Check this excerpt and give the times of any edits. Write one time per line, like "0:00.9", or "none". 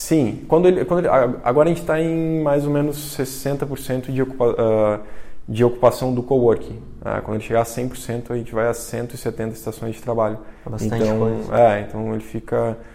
none